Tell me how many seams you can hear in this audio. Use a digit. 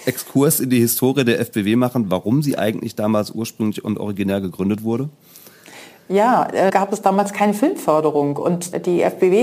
1